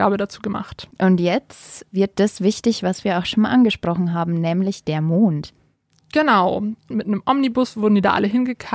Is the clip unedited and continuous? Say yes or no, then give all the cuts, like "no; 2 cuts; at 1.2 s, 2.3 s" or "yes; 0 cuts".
no; 2 cuts; at 0.9 s, 6.9 s